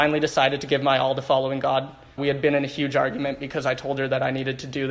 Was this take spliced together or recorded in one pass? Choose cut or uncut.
cut